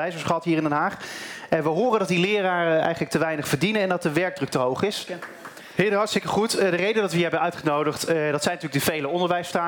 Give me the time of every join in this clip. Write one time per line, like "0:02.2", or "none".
0:05.1